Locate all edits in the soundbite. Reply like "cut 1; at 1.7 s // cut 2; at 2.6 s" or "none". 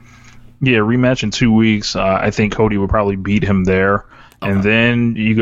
none